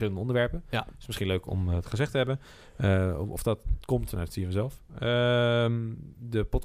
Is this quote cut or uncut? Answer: uncut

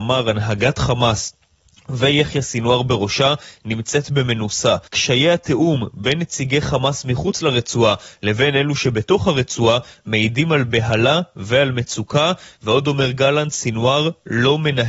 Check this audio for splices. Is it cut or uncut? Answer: cut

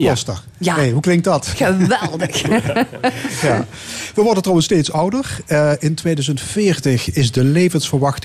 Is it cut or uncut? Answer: uncut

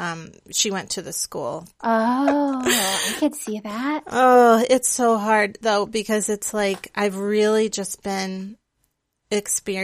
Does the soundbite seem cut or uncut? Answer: cut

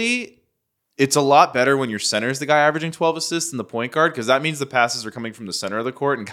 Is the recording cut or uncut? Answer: uncut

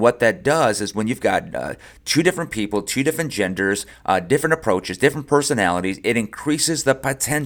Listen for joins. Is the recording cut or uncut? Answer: uncut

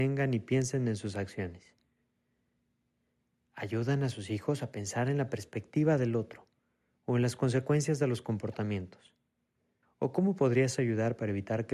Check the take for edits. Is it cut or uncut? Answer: cut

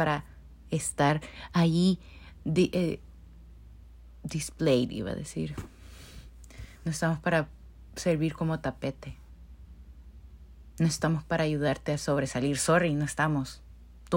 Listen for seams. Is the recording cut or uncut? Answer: uncut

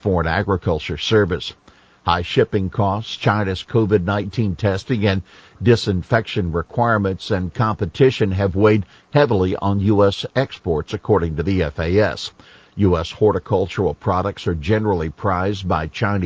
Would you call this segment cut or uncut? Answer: cut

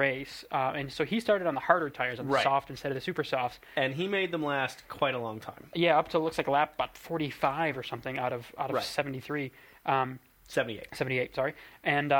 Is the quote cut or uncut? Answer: uncut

